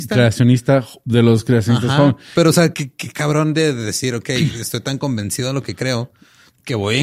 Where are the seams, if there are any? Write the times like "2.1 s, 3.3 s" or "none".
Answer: 2.7 s